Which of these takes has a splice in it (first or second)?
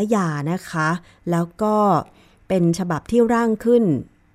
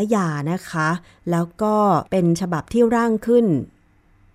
second